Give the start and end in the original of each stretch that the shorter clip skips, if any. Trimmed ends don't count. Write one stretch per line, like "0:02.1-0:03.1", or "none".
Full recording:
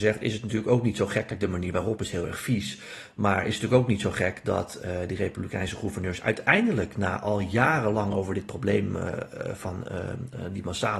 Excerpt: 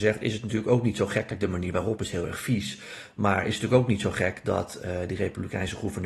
none